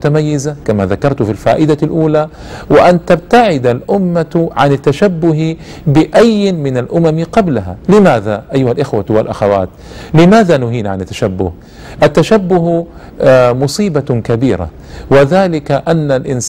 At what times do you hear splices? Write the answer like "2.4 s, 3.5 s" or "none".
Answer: none